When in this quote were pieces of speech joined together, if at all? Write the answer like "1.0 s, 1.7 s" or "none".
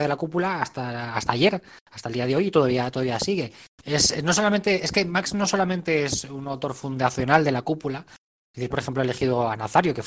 3.8 s, 8.7 s